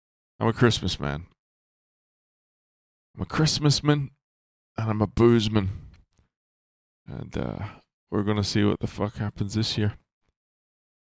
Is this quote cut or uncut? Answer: cut